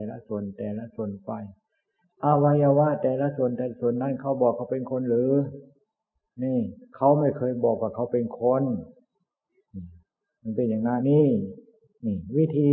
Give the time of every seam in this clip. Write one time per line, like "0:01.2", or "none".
0:11.0

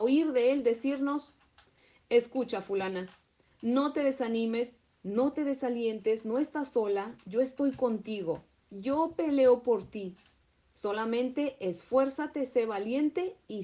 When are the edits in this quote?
none

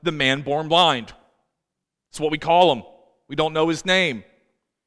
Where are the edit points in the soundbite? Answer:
none

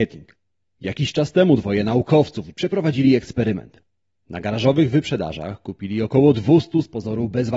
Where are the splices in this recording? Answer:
0:02.5

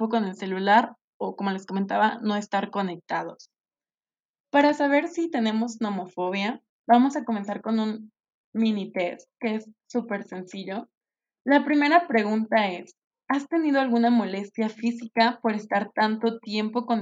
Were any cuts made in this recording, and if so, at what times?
none

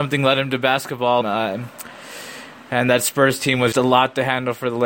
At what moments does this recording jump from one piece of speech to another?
0:01.2
0:03.7

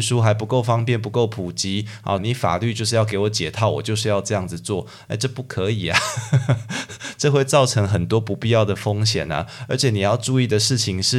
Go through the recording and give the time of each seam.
0:02.2

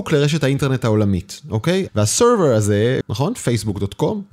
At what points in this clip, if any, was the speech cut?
0:01.9
0:03.0

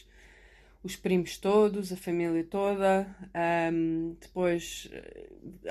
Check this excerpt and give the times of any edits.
none

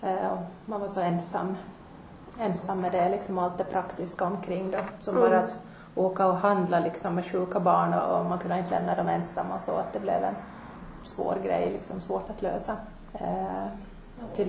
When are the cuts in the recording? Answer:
0:13.1

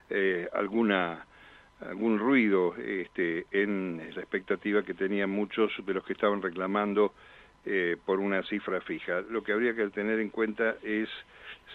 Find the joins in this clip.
none

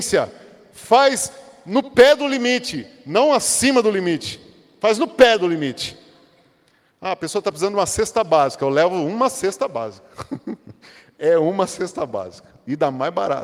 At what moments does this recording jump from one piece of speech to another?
none

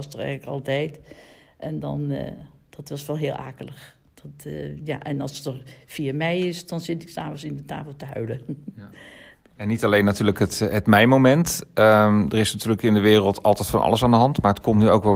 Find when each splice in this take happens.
none

